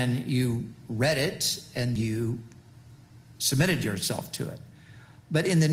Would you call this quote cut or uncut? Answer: cut